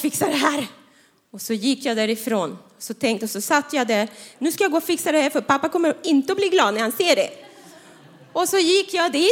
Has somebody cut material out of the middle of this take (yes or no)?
yes